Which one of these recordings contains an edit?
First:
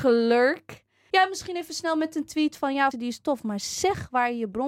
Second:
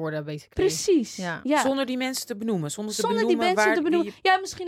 first; 2 cuts; at 1.1 s, 2.9 s

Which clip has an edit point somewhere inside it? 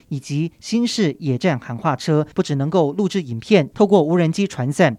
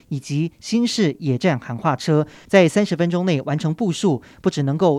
first; 2 cuts; at 2.3 s, 3.7 s

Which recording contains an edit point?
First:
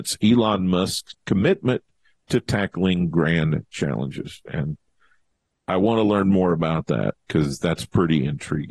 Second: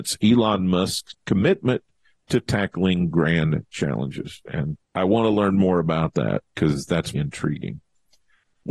second; 2 cuts; at 4.8 s, 7.1 s

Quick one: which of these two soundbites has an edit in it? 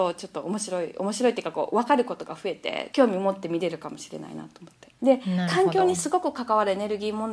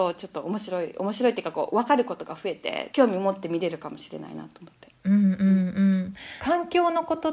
first; 1 cut; at 5.0 s

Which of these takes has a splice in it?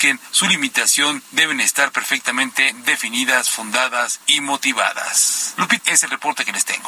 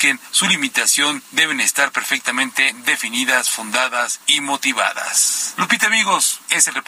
first; 1 cut; at 5.8 s

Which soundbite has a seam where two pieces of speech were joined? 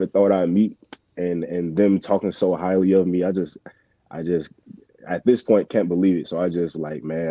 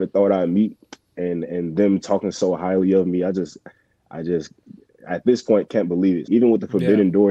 second; 1 cut; at 6.2 s

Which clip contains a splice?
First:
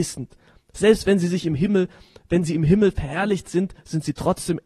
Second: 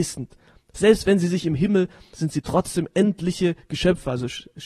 second; 1 cut; at 2.1 s

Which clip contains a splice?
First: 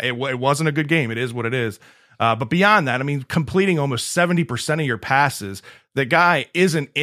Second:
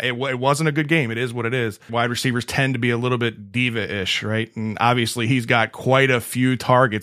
second; 1 cut; at 1.9 s

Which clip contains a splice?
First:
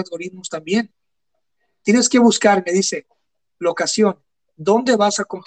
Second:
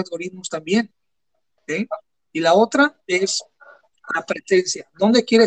second; 1 cut; at 1.6 s

